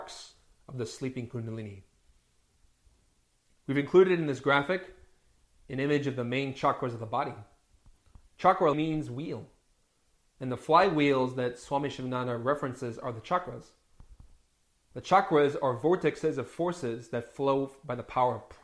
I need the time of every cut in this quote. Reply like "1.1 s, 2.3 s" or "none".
8.7 s

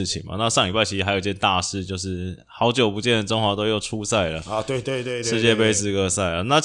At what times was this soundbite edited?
4.8 s

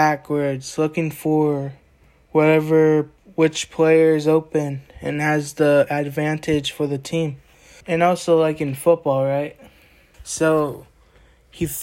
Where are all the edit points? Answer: 7.8 s, 10.1 s

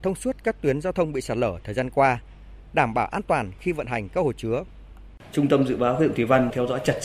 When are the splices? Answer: none

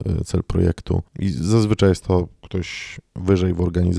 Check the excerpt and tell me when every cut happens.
1.1 s

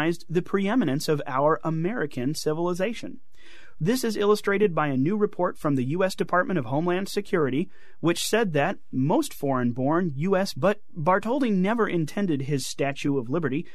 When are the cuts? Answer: 3.8 s, 10.5 s

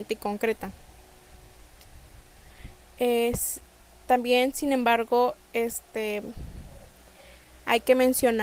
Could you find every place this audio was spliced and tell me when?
none

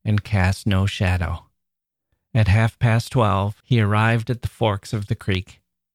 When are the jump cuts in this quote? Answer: 3.6 s

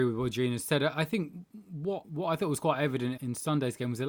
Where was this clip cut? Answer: 2.0 s, 3.2 s

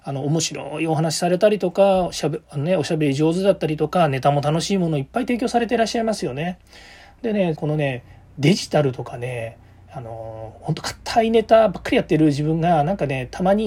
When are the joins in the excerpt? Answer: 7.5 s

